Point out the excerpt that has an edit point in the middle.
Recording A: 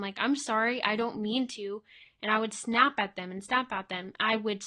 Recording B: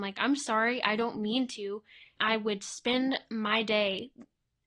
B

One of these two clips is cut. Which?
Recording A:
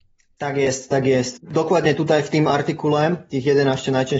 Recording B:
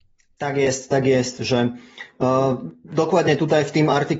A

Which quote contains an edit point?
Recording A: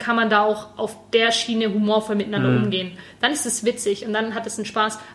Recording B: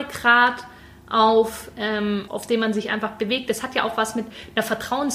B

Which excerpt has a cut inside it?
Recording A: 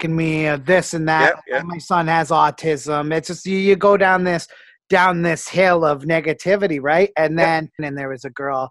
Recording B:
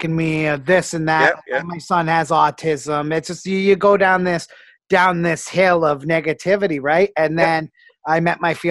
A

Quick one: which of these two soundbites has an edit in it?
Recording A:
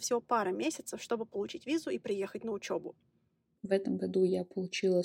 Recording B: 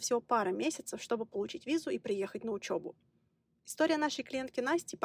A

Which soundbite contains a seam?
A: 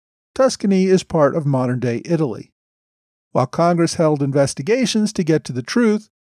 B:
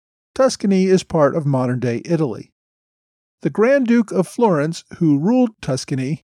A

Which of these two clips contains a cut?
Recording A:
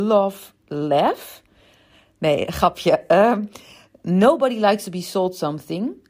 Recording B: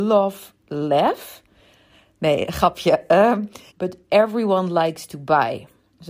B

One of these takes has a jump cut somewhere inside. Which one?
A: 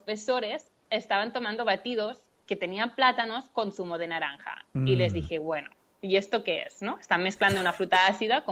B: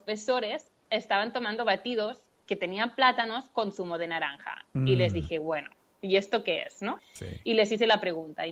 B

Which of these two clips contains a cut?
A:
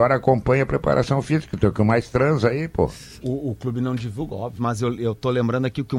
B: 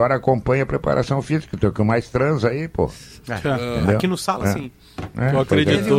A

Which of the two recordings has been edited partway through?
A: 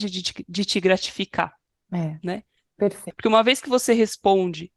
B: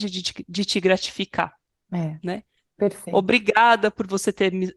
A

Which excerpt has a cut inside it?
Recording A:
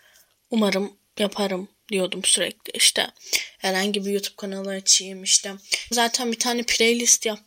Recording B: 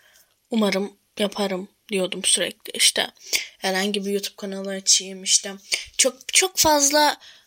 A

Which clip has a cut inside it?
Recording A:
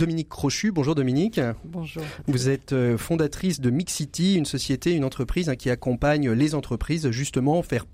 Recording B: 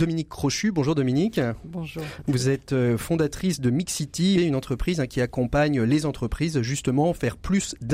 B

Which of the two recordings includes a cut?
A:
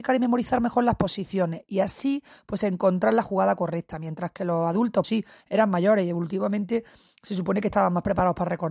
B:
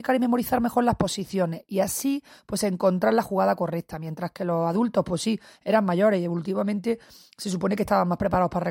A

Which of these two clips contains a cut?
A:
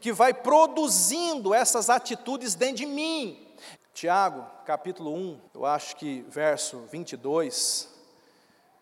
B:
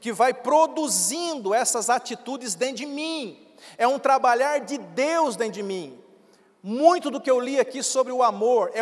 A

